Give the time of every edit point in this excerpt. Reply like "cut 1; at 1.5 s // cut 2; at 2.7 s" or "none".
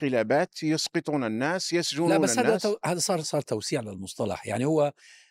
cut 1; at 3.2 s